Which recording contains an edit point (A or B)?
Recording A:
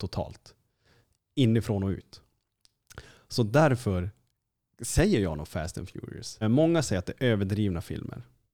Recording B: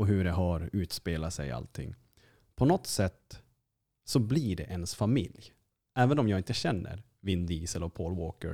A